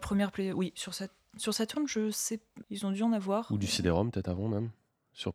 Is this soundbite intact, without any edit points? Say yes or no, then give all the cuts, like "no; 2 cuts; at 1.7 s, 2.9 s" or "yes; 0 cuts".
no; 1 cut; at 2.6 s